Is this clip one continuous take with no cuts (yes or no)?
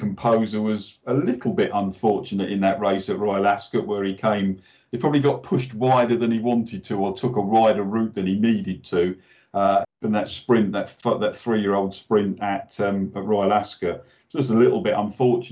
no